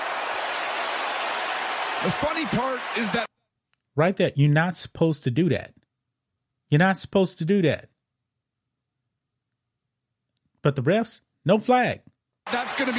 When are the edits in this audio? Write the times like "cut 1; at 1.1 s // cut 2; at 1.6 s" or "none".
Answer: none